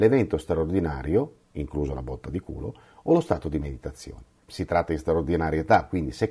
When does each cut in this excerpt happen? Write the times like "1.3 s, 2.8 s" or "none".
4.4 s